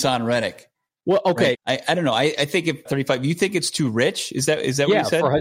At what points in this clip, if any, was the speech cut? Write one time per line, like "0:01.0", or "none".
0:01.5
0:02.8